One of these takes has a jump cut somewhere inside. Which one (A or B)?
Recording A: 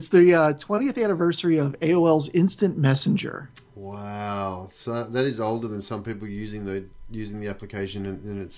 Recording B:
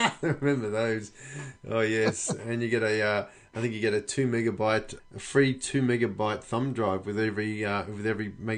B